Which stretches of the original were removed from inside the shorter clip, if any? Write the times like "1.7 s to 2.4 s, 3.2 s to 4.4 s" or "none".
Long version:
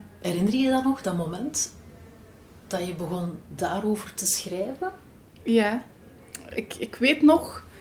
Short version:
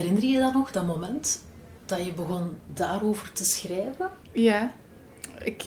2.1 s to 2.6 s, 5.0 s to 5.3 s